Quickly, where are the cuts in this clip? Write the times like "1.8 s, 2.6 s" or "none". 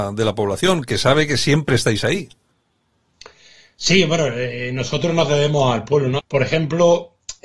6.2 s